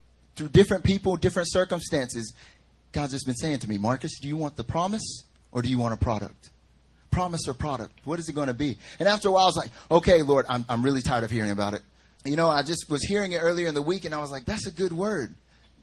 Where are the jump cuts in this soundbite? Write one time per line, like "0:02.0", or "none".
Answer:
0:08.0
0:12.2
0:14.4